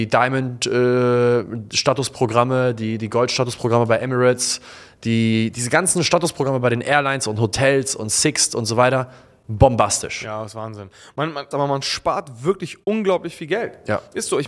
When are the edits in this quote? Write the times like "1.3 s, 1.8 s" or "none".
11.5 s